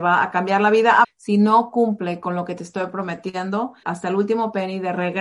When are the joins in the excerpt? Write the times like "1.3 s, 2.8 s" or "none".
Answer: 1.0 s, 3.8 s